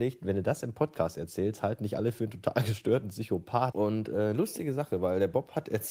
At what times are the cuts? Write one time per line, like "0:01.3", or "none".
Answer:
0:03.7